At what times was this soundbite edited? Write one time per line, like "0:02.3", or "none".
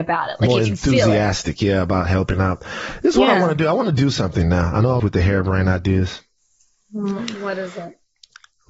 0:05.0